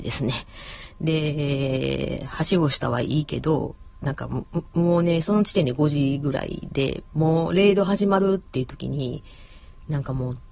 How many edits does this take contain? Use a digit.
0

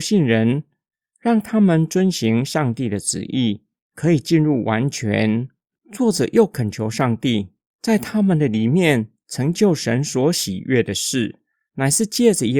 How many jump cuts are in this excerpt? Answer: 1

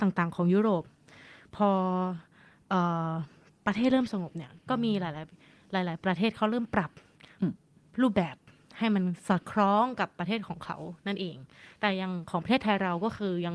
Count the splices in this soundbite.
0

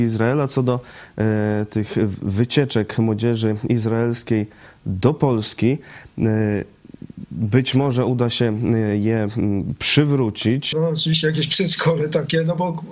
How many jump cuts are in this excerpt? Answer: 1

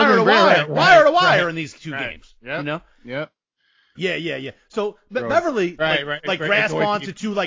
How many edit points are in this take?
2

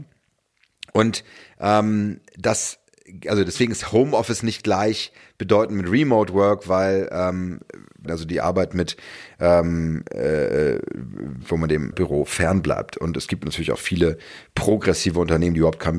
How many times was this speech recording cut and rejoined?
2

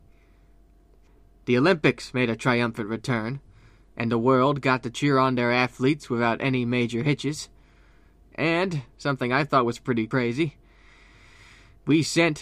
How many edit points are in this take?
0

